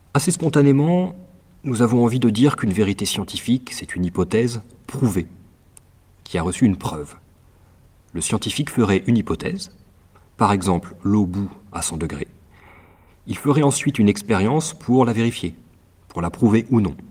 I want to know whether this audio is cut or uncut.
uncut